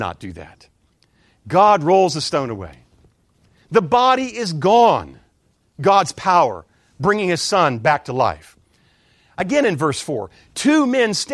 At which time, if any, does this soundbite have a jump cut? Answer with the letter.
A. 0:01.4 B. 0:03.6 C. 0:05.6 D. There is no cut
C